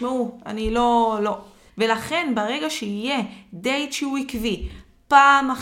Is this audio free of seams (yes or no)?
no